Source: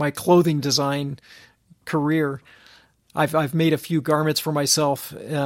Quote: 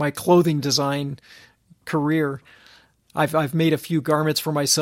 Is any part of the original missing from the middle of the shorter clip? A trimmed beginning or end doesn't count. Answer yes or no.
no